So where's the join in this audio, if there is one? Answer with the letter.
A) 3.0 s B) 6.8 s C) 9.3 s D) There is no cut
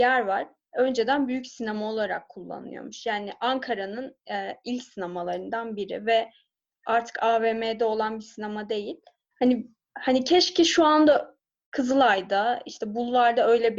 C